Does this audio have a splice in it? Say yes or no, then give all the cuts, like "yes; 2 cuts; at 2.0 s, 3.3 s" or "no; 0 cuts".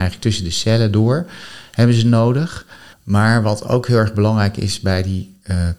yes; 1 cut; at 2.9 s